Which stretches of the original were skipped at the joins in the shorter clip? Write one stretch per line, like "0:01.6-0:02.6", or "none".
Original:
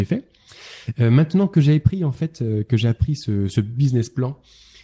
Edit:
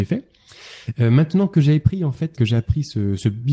0:02.3-0:02.6